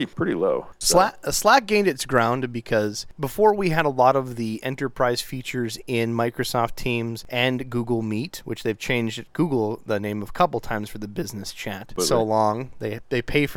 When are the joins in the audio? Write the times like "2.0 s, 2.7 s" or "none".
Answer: 12.0 s